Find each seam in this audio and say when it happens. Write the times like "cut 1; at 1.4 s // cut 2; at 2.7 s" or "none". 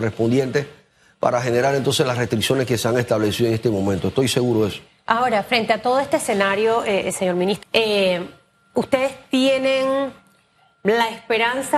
cut 1; at 7.6 s

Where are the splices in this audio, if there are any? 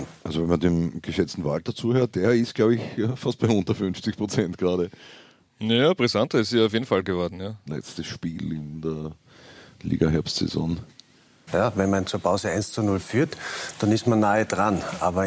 cut 1; at 7.7 s // cut 2; at 11.5 s

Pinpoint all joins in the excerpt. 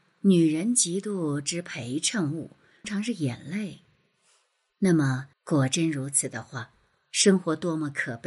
cut 1; at 2.8 s // cut 2; at 5.3 s

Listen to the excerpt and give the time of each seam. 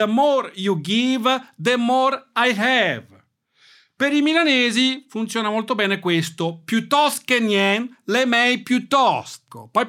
none

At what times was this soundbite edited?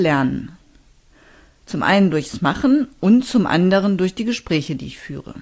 none

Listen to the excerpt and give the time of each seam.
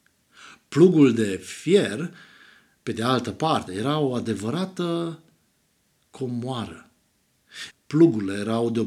cut 1; at 3.7 s // cut 2; at 7.7 s

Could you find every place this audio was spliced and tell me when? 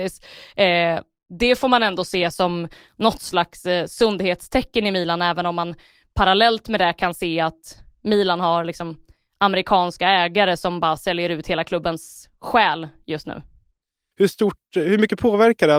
cut 1; at 14.1 s

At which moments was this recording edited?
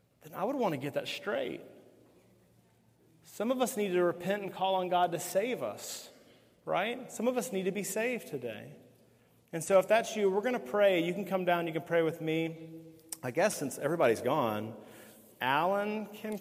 none

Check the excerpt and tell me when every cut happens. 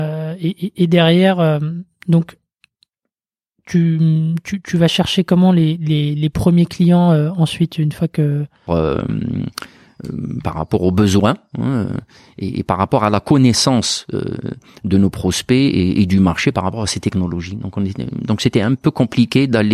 cut 1; at 8.7 s

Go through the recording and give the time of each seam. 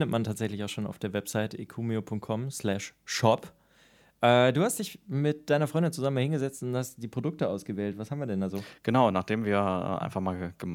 none

